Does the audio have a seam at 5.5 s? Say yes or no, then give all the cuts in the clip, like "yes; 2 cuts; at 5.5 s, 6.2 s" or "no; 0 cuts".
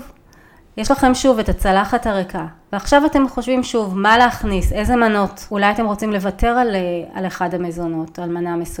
yes; 1 cut; at 5.5 s